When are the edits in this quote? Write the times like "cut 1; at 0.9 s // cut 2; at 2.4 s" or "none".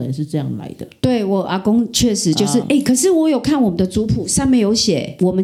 cut 1; at 2.6 s